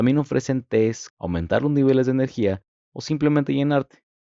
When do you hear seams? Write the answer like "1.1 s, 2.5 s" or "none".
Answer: 1.1 s